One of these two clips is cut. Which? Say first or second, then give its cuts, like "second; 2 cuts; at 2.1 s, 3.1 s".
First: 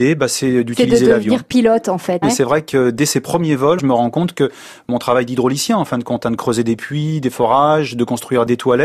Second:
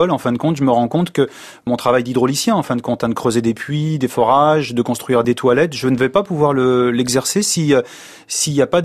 first; 2 cuts; at 2.2 s, 3.8 s